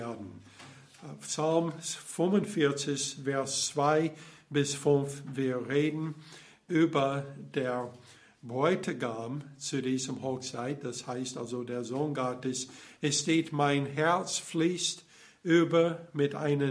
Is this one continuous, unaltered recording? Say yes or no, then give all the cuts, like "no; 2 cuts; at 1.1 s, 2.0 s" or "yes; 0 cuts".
yes; 0 cuts